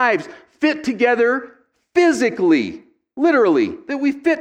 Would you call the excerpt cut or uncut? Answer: uncut